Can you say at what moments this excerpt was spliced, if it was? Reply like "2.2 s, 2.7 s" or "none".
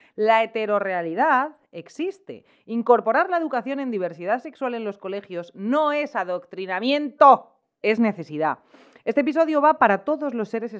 none